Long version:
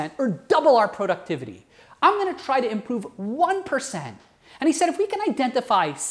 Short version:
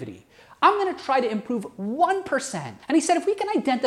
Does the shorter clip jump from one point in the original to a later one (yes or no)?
yes